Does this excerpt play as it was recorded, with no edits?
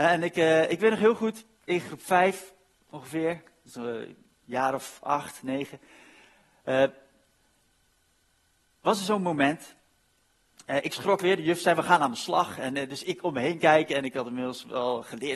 yes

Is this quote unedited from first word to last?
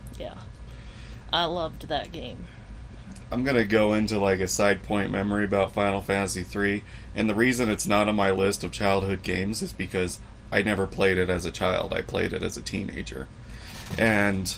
yes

